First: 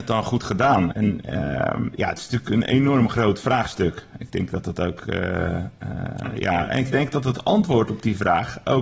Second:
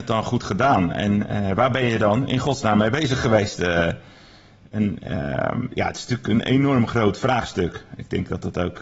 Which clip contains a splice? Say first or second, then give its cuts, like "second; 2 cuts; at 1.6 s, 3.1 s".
first; 1 cut; at 0.9 s